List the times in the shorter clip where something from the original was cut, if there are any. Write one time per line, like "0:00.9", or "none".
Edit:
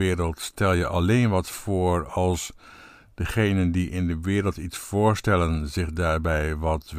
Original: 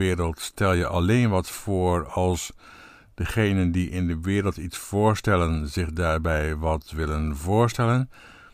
none